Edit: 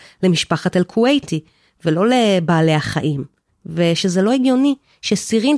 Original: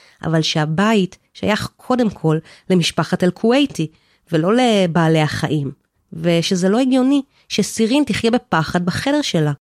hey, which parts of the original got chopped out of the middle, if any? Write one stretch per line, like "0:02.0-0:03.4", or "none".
none